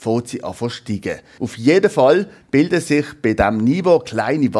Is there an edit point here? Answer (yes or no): yes